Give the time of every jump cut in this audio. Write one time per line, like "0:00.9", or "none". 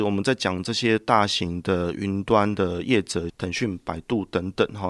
0:03.3